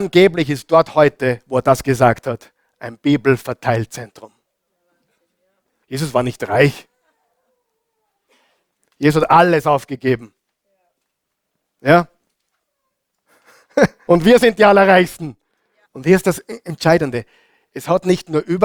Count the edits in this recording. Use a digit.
3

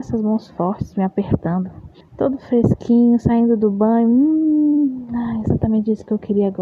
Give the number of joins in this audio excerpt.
1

